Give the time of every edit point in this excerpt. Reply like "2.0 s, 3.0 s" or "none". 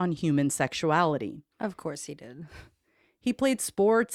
none